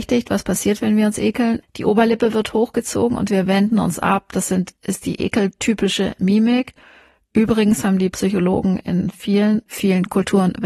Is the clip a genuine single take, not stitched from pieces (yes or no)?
no